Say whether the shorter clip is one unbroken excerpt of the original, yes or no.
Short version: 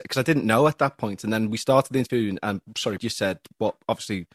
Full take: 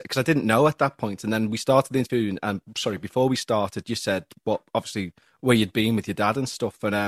no